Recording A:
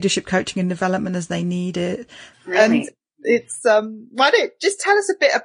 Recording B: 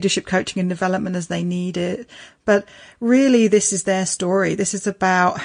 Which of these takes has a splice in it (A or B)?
A